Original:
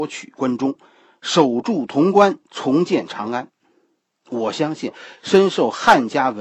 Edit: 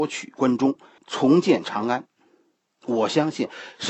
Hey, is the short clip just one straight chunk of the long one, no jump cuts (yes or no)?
no